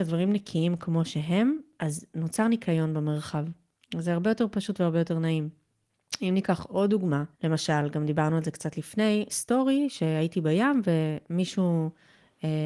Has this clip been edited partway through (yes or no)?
yes